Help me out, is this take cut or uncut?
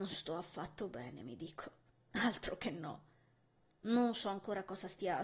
uncut